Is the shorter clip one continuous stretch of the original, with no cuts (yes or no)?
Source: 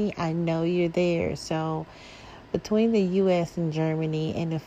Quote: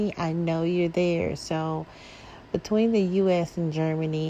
yes